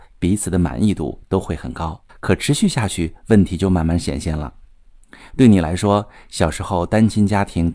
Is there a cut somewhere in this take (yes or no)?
yes